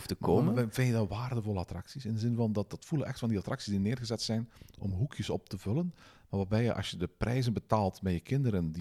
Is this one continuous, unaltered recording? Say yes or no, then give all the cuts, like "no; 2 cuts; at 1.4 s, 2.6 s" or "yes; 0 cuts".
yes; 0 cuts